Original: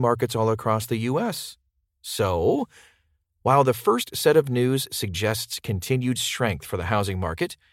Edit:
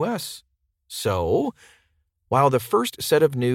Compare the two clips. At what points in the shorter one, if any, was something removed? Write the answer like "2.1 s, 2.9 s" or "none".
none